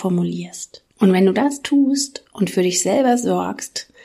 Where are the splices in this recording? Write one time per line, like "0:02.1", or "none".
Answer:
0:00.9